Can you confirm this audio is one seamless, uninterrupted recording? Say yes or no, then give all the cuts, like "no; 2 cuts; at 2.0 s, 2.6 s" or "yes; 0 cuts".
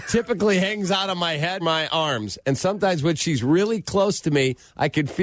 no; 1 cut; at 1.6 s